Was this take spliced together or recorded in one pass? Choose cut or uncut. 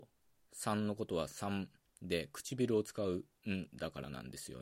uncut